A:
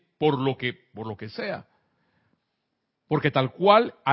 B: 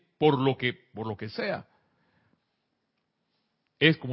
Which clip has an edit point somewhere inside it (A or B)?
A